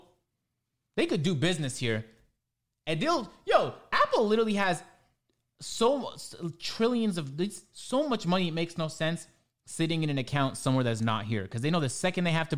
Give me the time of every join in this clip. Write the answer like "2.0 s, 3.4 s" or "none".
none